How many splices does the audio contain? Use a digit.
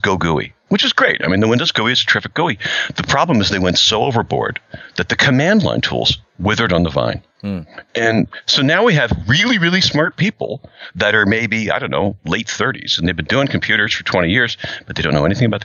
0